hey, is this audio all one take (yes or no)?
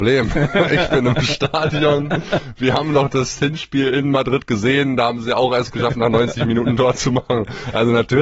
yes